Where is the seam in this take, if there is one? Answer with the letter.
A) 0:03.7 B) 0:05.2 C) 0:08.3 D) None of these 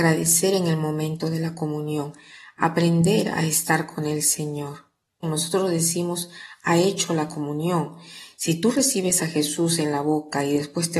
B